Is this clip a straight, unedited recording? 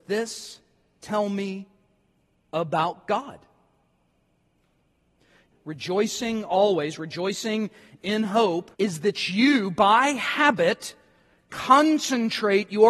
no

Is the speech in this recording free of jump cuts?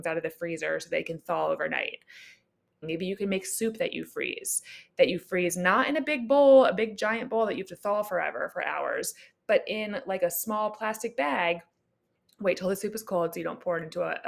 no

